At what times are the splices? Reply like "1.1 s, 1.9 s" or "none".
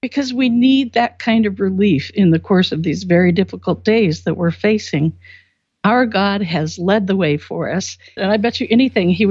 8.2 s